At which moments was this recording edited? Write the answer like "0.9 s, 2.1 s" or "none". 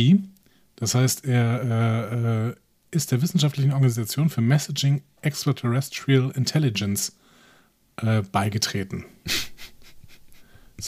none